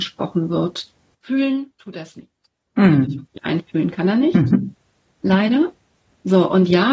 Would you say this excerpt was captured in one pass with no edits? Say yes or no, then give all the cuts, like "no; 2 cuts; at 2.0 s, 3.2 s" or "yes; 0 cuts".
no; 1 cut; at 1.1 s